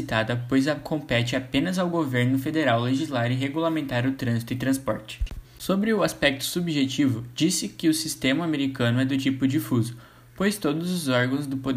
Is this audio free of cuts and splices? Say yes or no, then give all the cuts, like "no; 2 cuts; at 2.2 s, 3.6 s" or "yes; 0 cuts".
no; 1 cut; at 5.4 s